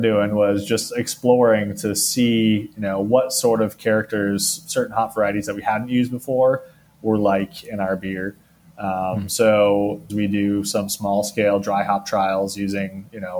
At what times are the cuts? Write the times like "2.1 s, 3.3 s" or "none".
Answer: 10.1 s